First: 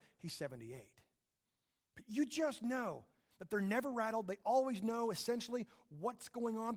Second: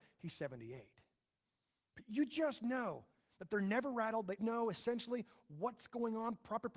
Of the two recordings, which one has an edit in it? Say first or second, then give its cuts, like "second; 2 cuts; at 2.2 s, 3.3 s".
second; 1 cut; at 4.4 s